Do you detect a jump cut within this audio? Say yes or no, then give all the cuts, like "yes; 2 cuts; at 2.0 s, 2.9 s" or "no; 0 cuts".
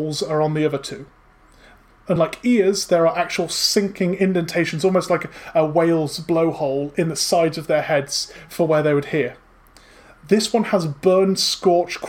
no; 0 cuts